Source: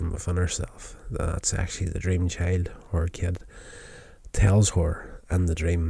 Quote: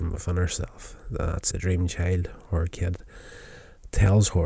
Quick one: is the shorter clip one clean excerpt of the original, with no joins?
no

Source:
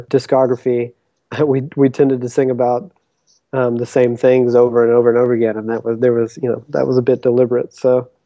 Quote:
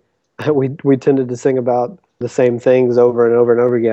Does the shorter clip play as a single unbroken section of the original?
no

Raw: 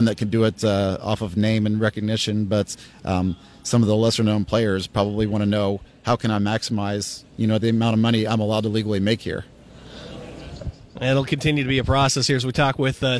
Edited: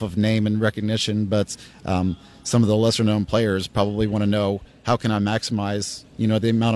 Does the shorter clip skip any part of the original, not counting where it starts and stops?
no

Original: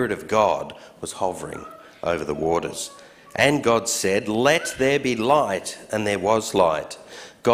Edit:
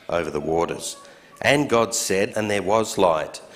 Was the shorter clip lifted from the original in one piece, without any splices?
no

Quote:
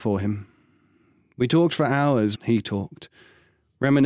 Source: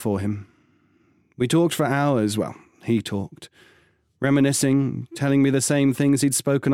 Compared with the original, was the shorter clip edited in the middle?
yes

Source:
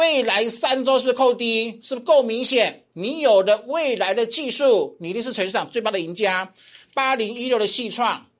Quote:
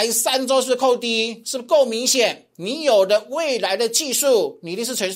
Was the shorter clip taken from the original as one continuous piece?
yes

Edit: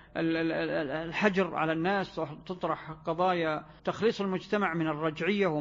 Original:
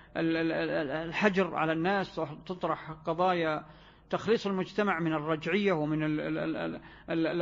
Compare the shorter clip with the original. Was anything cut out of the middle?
yes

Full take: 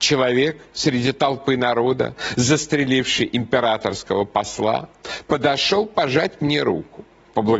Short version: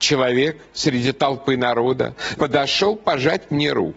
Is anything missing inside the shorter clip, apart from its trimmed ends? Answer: yes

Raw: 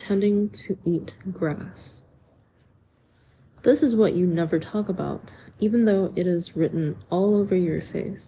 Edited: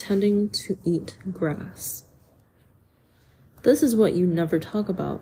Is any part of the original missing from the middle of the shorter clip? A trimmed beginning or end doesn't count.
no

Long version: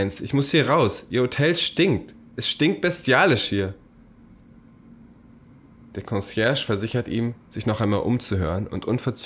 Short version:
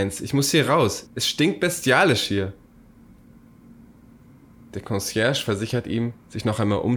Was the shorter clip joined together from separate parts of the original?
yes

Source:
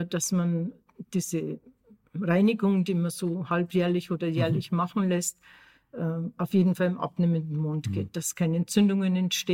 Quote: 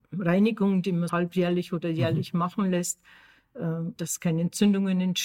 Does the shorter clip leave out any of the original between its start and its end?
yes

